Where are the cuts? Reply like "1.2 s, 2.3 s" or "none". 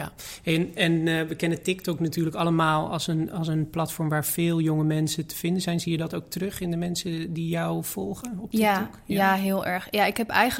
none